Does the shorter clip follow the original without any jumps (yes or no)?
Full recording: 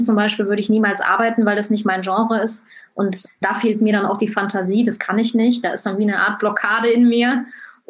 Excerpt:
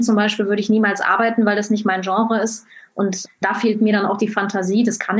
yes